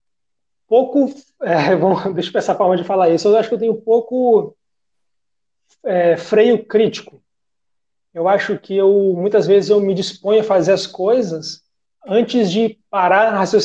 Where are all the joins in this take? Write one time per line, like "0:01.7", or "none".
none